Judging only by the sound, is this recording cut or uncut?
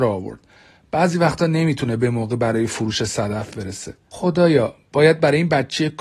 cut